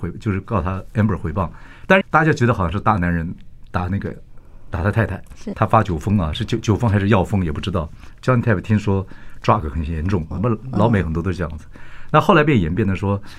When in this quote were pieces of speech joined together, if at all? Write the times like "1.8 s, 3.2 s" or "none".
2.0 s, 5.5 s, 10.3 s